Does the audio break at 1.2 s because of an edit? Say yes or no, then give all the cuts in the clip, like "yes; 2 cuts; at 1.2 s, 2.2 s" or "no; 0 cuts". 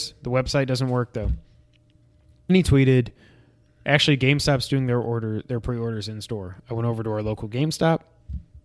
no; 1 cut; at 2.5 s